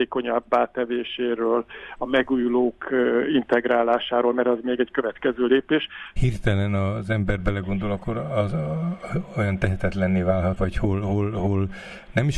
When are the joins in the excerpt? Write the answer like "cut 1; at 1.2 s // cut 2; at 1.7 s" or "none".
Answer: cut 1; at 6.2 s // cut 2; at 10.6 s

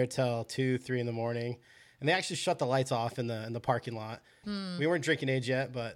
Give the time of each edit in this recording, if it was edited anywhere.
cut 1; at 4.4 s

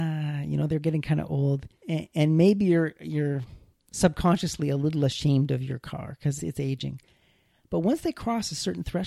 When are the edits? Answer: cut 1; at 1.8 s // cut 2; at 6.4 s

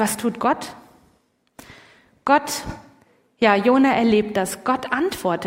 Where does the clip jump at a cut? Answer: none

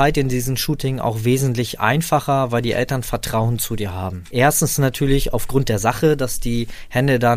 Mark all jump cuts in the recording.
cut 1; at 4.3 s

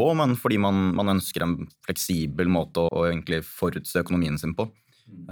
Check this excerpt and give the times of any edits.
cut 1; at 2.9 s

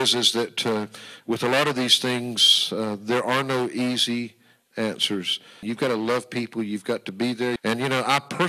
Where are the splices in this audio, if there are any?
cut 1; at 5.6 s // cut 2; at 7.6 s

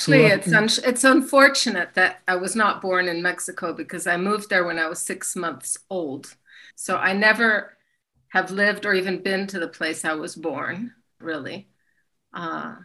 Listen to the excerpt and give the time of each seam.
cut 1; at 6.7 s // cut 2; at 11.2 s

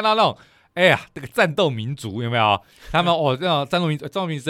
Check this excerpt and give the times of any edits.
none

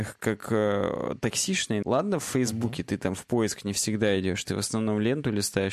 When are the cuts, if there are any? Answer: cut 1; at 1.8 s

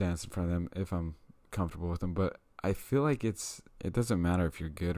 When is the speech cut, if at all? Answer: cut 1; at 3.8 s

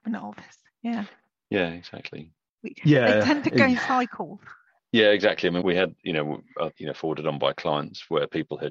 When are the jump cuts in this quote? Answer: cut 1; at 2.6 s // cut 2; at 5.6 s // cut 3; at 6.8 s

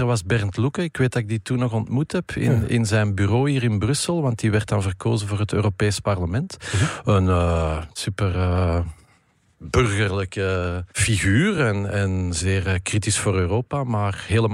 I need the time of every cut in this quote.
none

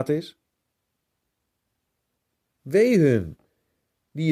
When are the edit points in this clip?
cut 1; at 2.4 s

